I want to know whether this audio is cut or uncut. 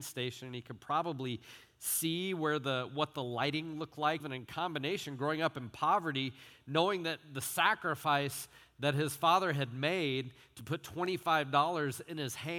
cut